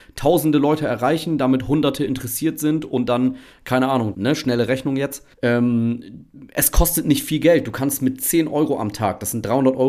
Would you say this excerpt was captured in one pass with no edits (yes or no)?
no